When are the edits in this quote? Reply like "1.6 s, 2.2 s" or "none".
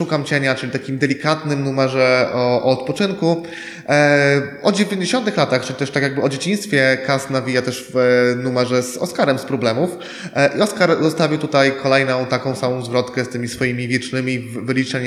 none

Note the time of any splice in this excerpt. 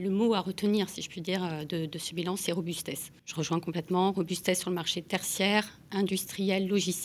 3.2 s

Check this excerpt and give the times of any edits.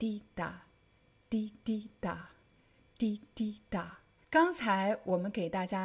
4.2 s

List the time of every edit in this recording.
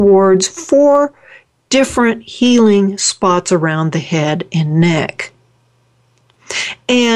none

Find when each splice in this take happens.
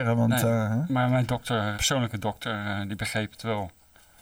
1.7 s

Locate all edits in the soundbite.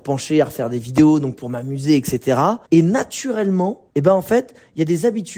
2.6 s, 3.9 s

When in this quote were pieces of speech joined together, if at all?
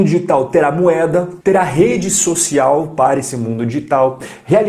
1.4 s

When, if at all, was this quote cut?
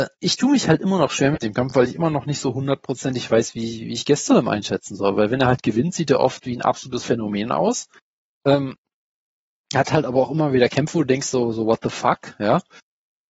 none

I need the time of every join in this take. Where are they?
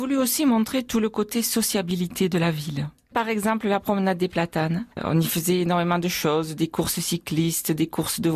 none

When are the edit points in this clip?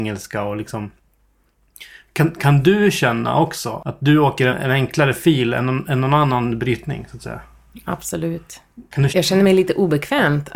4.5 s, 9.1 s

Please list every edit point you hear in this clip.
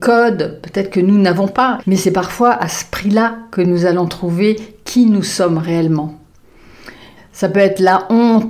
1.8 s, 7.2 s

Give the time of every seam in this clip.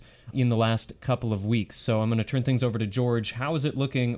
none

